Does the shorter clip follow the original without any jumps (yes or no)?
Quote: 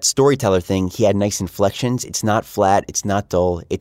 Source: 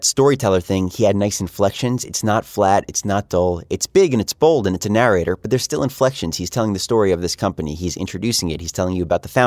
yes